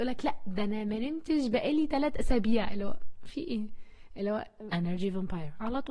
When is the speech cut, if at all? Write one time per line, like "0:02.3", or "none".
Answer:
0:04.7